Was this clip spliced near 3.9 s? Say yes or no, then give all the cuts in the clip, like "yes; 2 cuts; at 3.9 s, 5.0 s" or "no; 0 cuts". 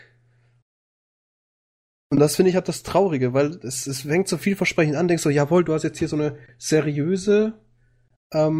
yes; 1 cut; at 3.9 s